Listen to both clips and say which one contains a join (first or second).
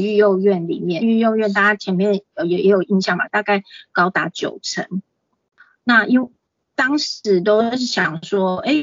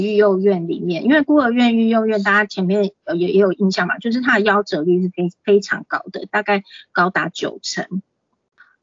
first